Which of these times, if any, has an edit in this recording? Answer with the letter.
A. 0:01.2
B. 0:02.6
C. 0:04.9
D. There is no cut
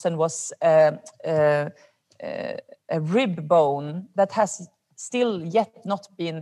D